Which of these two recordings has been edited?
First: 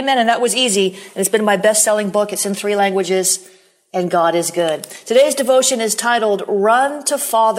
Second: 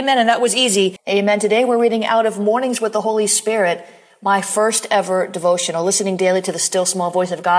second; 1 cut; at 1.0 s

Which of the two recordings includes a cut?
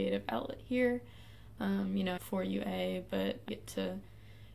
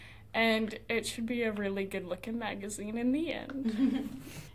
first; 2 cuts; at 2.2 s, 3.5 s

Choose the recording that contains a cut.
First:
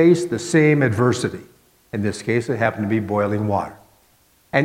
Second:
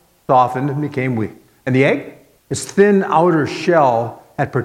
second; 1 cut; at 2.4 s

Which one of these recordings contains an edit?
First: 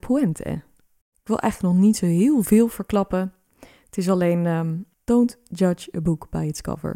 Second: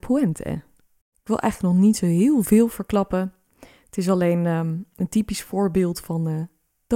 first; 1 cut; at 4.9 s

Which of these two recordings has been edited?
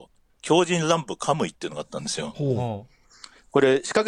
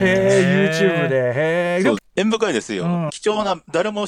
second; 2 cuts; at 2.0 s, 3.1 s

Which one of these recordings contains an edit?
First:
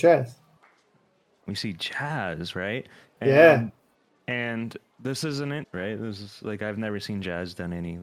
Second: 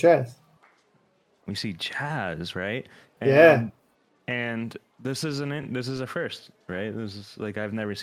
first; 1 cut; at 5.6 s

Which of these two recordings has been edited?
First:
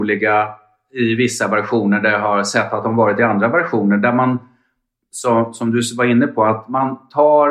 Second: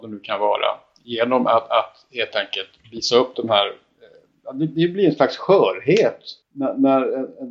second; 1 cut; at 6.4 s

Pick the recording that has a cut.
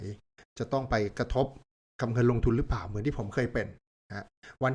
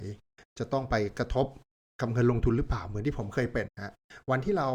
second; 1 cut; at 3.7 s

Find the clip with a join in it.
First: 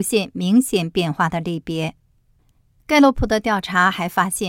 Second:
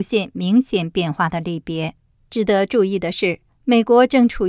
second; 1 cut; at 2.2 s

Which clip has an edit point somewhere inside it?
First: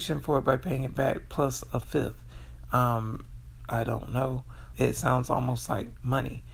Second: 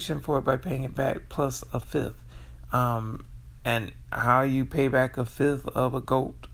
first; 2 cuts; at 3.6 s, 4.7 s

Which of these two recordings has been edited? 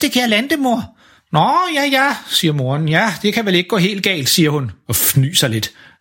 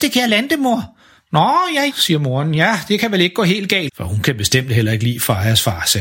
second; 2 cuts; at 1.9 s, 3.9 s

